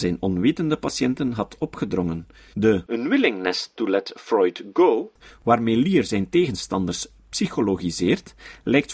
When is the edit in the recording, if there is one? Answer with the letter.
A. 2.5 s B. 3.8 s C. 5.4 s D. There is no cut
A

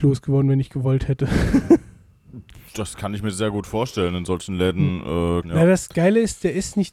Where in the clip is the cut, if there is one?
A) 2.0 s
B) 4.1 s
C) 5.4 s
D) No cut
C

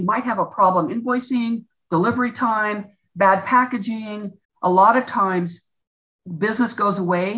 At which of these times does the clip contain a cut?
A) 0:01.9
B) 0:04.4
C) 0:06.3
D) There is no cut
B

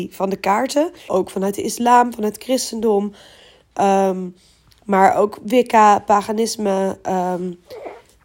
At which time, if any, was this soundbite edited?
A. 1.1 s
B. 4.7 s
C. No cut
A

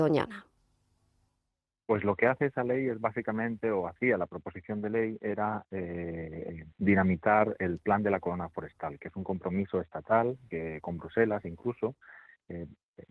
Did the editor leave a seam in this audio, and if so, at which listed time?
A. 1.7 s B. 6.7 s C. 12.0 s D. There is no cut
B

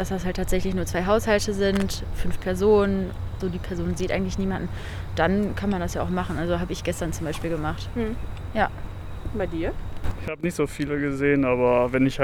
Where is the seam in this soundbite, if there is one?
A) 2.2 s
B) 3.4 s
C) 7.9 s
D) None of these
B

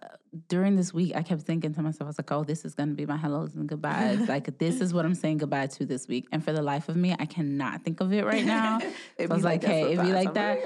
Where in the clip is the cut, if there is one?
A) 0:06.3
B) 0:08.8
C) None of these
C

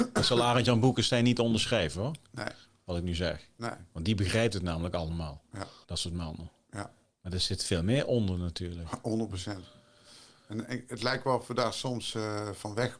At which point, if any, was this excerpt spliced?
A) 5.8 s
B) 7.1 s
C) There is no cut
A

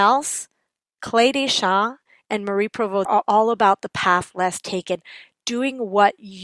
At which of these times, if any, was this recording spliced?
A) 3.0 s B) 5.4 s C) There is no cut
A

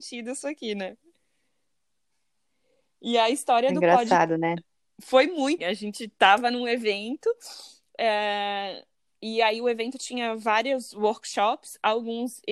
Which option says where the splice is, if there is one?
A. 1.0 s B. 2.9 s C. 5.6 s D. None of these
C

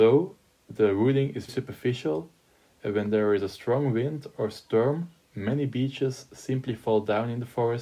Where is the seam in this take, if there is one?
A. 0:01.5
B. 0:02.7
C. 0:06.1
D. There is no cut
A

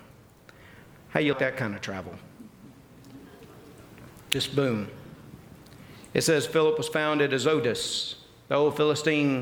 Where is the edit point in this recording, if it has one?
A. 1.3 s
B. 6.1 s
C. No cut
A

